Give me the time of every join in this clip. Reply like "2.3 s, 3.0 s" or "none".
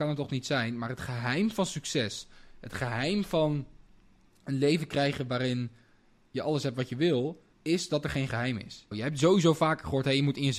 7.5 s, 8.9 s